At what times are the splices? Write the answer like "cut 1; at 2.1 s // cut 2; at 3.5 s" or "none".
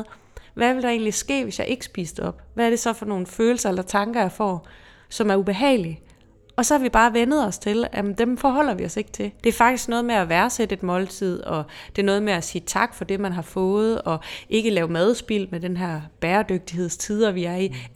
cut 1; at 9.4 s